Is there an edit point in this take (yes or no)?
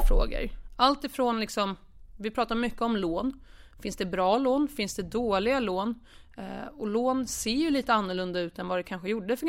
no